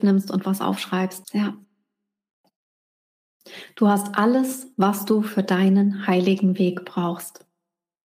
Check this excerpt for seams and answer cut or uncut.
cut